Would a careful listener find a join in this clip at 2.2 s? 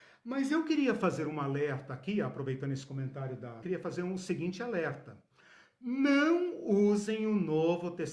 no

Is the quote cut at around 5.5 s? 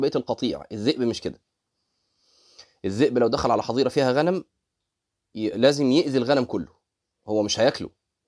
no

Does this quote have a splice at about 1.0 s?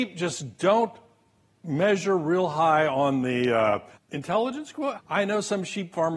no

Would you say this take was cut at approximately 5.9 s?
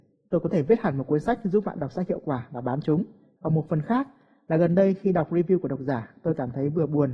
no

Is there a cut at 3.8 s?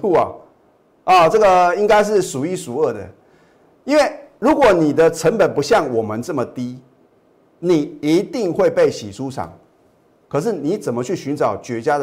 no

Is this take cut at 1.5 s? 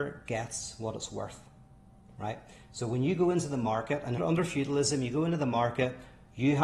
no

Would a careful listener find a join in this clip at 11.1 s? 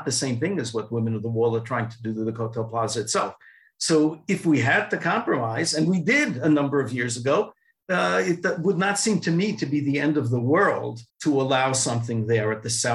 yes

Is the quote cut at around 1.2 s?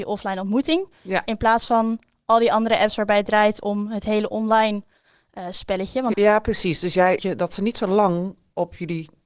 no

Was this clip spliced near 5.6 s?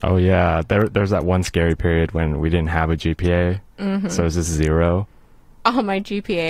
yes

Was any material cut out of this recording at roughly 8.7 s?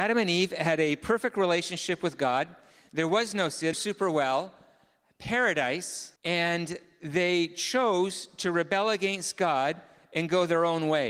no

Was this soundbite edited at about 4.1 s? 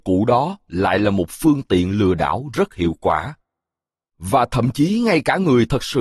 yes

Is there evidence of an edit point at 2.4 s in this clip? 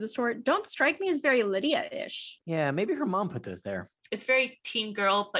yes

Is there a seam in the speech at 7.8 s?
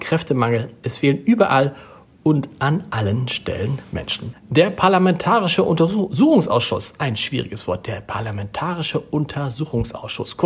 no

